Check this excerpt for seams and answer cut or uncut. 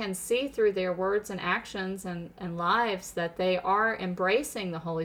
cut